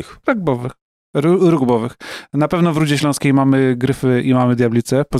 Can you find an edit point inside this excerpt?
no; 0 cuts

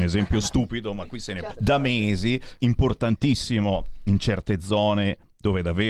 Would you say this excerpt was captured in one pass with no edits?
no; 2 cuts; at 1.5 s, 2.6 s

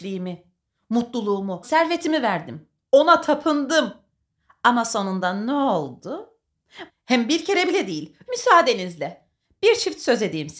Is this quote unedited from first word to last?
no; 3 cuts; at 1.6 s, 6.9 s, 8.3 s

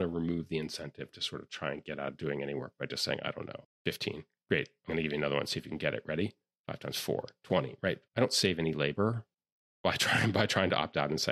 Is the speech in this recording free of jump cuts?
no; 1 cut; at 3.6 s

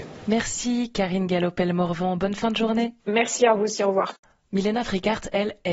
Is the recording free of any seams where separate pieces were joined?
yes; 0 cuts

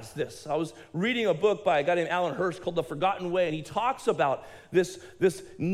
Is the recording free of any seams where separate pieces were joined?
yes; 0 cuts

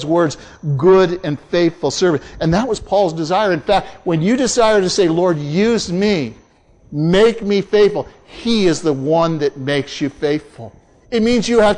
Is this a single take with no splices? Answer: yes; 0 cuts

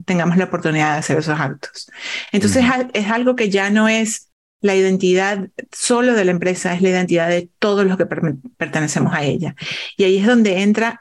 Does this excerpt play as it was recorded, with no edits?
yes; 0 cuts

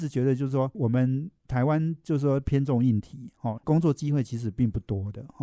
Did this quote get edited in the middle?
yes; 1 cut; at 3.6 s

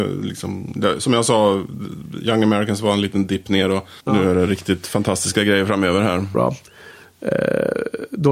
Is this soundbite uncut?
no; 2 cuts; at 4.0 s, 6.3 s

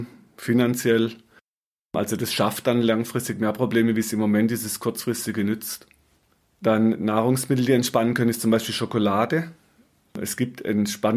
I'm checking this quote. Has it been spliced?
yes; 1 cut; at 10.1 s

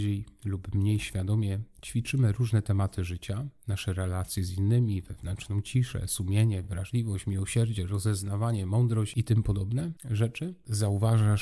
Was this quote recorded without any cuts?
yes; 0 cuts

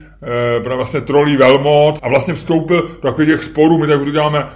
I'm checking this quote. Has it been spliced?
yes; 1 cut; at 2.0 s

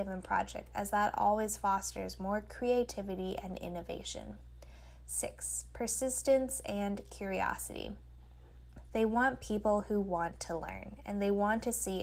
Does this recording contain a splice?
yes; 1 cut; at 8.9 s

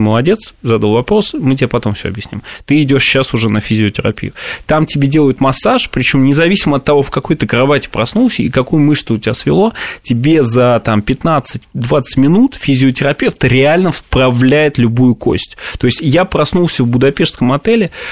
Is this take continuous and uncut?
yes; 0 cuts

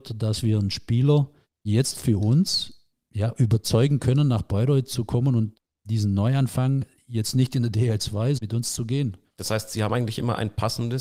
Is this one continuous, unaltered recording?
no; 1 cut; at 8.4 s

